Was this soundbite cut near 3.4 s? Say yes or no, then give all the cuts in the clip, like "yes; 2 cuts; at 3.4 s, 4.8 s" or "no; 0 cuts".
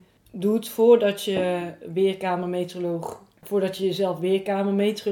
yes; 1 cut; at 3.4 s